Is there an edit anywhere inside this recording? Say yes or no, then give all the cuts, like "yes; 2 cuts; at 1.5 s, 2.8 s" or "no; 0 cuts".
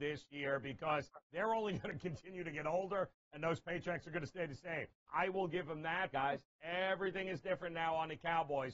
yes; 2 cuts; at 5.1 s, 6.1 s